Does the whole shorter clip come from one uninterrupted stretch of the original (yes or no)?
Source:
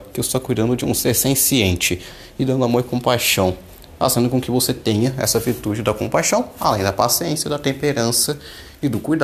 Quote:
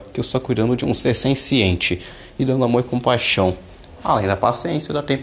no